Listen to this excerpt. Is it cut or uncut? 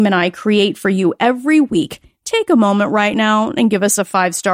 uncut